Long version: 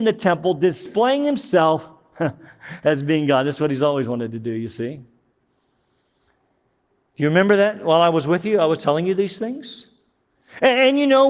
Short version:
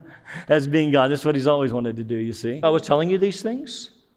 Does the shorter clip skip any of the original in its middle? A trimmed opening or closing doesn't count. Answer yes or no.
yes